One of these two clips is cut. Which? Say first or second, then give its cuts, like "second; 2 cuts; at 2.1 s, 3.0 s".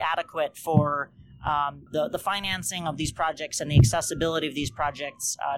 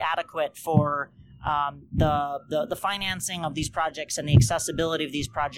first; 1 cut; at 1.9 s